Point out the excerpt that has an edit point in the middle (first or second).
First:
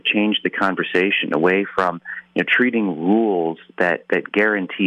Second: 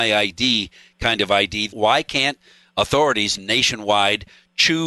second